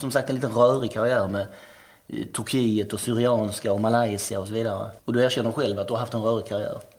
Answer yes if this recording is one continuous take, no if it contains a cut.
yes